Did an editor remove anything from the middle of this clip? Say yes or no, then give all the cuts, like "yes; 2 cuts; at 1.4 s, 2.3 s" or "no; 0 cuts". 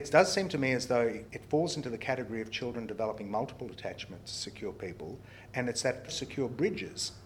yes; 2 cuts; at 1.3 s, 6.1 s